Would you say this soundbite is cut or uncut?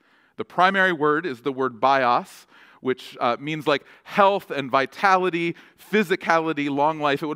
uncut